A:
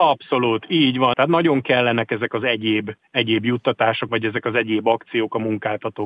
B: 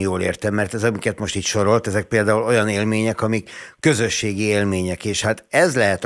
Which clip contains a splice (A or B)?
A